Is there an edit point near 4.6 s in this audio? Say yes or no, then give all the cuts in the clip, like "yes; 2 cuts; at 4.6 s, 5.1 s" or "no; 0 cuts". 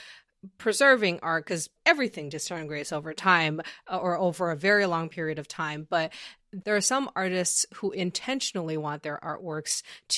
no; 1 cut; at 1.8 s